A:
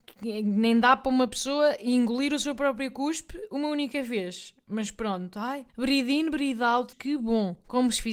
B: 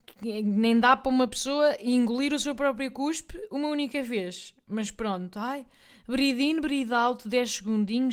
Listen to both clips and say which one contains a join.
A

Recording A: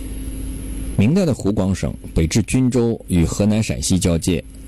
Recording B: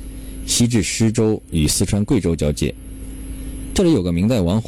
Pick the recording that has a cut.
A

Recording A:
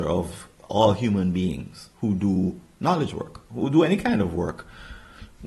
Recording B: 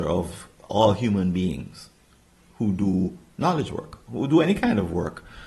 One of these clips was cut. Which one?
A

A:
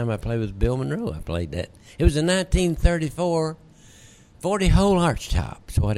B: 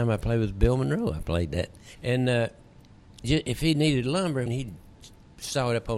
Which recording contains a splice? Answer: B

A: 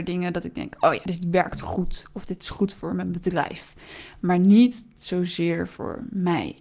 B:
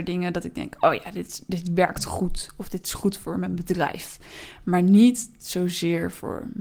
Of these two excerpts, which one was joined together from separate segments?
A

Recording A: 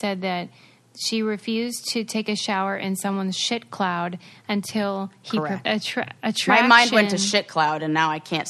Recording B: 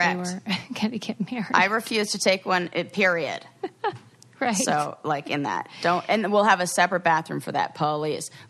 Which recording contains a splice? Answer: A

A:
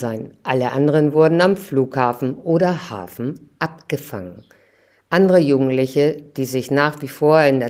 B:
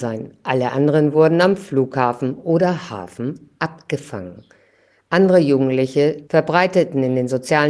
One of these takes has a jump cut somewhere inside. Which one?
B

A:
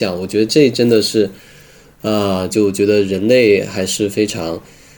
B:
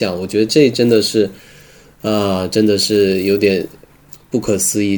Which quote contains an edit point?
A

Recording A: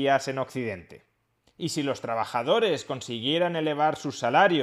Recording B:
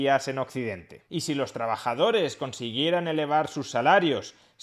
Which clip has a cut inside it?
B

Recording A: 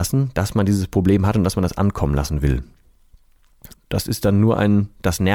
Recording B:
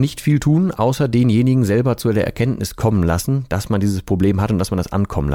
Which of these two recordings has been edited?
A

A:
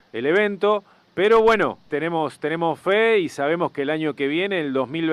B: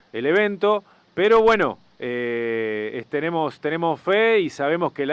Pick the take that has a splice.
A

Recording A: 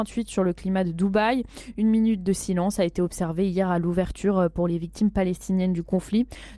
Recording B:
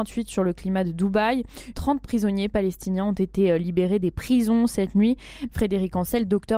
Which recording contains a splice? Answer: B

